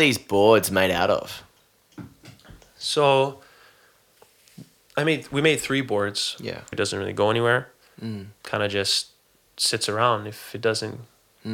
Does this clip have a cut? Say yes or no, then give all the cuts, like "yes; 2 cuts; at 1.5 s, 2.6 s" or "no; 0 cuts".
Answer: yes; 1 cut; at 6.7 s